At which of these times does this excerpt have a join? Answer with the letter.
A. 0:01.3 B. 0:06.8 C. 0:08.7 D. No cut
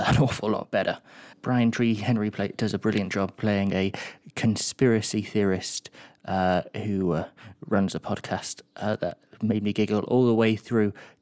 A